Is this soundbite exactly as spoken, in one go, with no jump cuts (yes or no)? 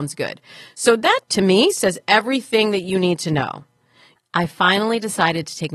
no